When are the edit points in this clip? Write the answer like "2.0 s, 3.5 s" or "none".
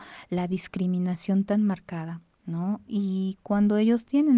2.9 s